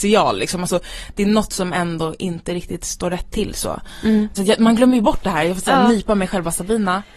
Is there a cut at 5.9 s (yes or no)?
no